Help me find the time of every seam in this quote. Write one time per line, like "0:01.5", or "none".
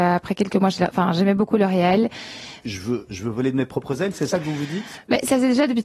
0:02.6